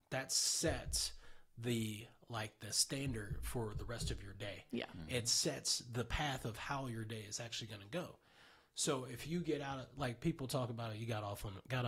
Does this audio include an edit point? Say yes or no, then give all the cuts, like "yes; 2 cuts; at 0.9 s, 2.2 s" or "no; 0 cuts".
no; 0 cuts